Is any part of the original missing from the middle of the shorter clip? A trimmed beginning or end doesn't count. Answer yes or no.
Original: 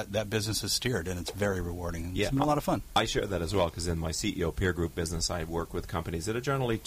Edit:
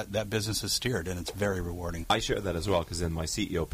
yes